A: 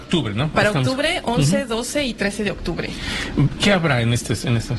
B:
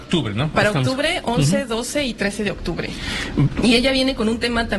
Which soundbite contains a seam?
B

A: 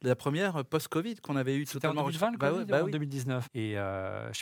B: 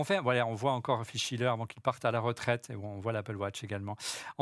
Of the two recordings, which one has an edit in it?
A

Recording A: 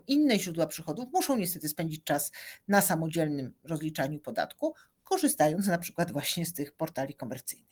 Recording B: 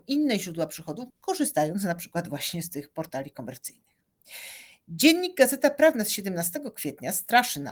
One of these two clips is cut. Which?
B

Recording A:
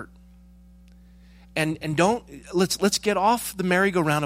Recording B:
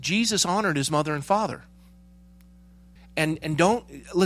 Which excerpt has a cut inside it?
B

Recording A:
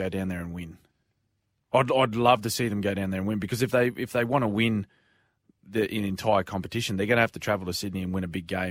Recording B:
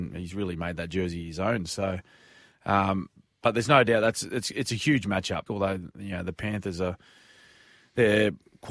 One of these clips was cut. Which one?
B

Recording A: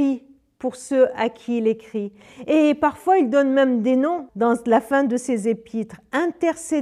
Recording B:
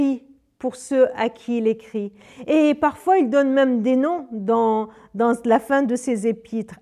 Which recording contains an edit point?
A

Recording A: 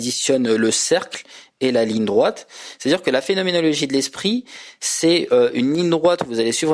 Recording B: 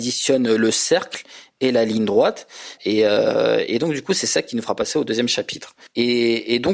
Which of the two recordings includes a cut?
B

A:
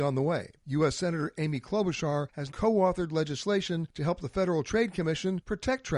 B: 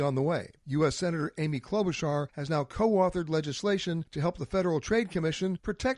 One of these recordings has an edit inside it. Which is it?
A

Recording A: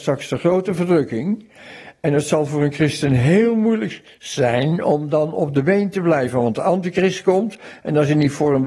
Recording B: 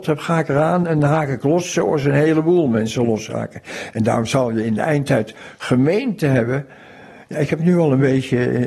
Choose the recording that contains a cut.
A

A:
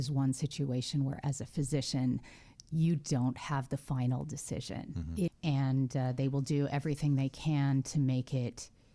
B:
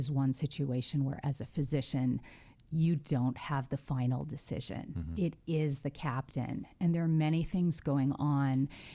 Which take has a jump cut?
A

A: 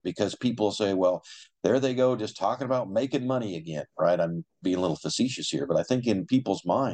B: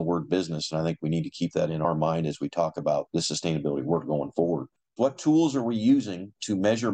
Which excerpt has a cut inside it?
B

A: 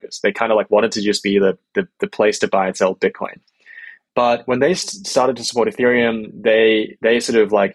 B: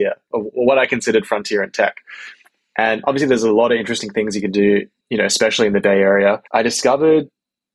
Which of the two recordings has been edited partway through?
B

